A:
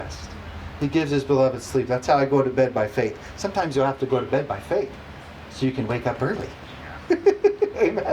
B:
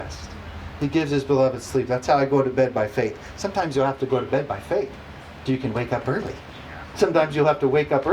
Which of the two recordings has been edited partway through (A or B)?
B